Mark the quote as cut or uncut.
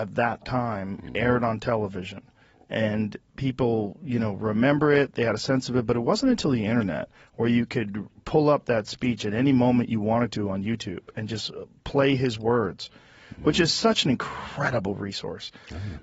uncut